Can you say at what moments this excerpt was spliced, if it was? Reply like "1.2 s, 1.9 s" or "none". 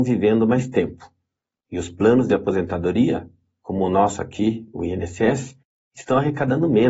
none